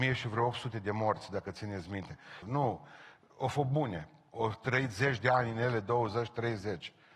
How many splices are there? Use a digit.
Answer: 1